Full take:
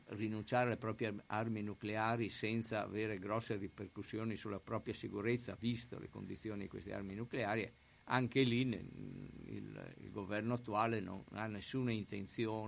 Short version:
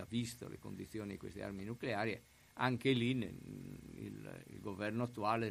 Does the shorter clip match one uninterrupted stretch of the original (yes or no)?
yes